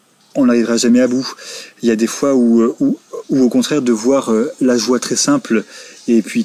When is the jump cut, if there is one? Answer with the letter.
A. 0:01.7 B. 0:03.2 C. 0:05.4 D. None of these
B